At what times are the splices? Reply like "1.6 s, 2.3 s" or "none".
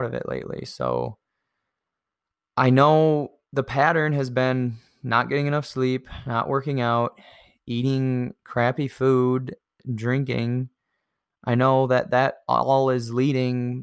none